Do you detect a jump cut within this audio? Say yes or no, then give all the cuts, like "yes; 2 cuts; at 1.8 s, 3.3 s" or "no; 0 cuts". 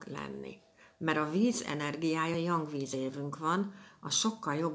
no; 0 cuts